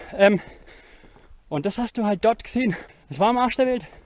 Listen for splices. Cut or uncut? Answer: cut